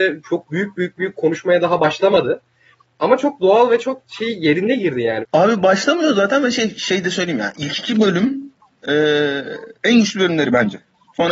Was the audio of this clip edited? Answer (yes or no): yes